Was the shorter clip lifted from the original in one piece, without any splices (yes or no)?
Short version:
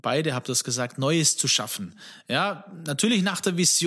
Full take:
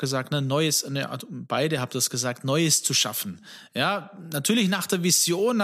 yes